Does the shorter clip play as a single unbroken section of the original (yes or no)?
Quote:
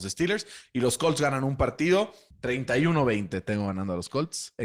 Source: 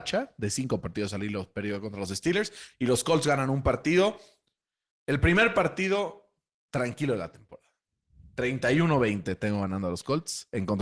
no